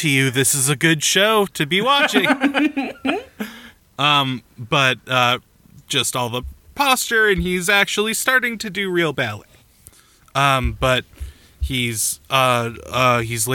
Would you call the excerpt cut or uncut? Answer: uncut